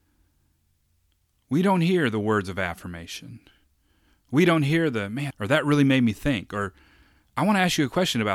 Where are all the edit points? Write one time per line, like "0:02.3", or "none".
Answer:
0:05.3